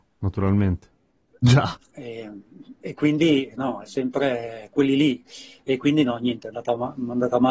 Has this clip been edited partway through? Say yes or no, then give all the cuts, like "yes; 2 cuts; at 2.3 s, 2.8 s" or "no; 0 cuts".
no; 0 cuts